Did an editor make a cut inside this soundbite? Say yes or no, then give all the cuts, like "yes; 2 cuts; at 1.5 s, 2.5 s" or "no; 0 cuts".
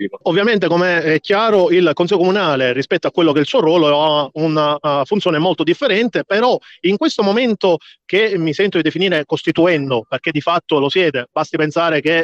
no; 0 cuts